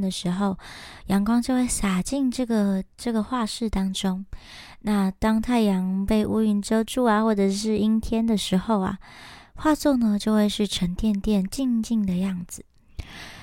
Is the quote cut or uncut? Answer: uncut